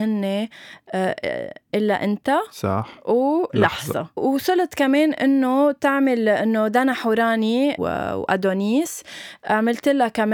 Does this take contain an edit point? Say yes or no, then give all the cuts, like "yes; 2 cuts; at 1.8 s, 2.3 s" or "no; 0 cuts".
yes; 2 cuts; at 4.2 s, 7.8 s